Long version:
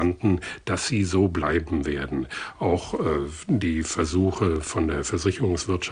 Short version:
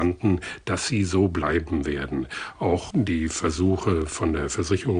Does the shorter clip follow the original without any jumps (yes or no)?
no